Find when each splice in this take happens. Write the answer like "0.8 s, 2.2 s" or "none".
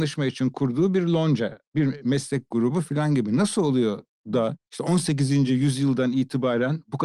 none